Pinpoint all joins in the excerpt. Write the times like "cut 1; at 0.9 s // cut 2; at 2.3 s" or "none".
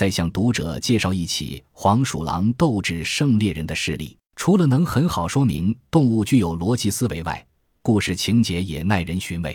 cut 1; at 4.2 s